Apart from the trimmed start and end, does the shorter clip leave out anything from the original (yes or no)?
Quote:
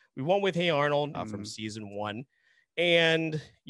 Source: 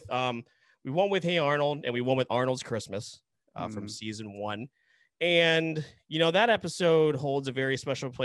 yes